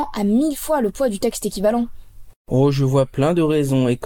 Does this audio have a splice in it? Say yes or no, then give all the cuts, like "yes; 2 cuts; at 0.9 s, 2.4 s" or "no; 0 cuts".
yes; 1 cut; at 2.4 s